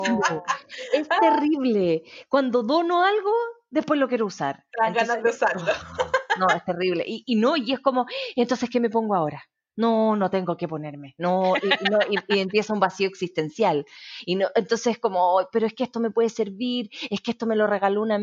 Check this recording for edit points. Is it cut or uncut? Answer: uncut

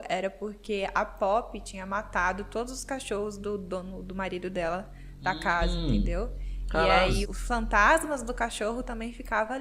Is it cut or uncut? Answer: cut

